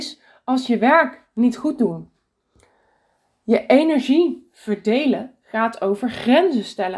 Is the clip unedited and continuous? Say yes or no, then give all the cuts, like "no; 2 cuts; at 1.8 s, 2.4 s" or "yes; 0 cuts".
yes; 0 cuts